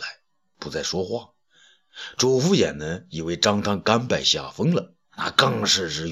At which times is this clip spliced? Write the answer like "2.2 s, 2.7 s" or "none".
5.0 s